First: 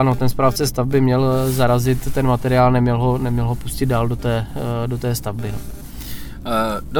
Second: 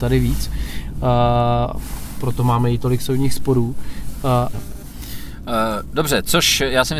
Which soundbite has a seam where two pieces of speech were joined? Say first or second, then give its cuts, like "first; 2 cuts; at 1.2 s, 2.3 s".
second; 1 cut; at 4.5 s